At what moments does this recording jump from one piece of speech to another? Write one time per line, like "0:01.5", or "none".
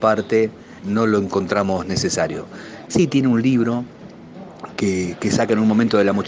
0:02.9